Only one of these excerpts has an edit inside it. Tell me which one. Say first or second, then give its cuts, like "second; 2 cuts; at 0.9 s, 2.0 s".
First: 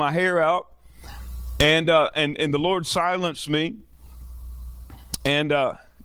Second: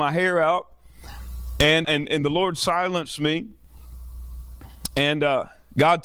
second; 1 cut; at 1.8 s